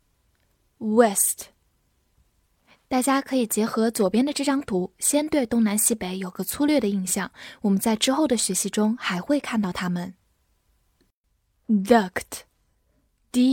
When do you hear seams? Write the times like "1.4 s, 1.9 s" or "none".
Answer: none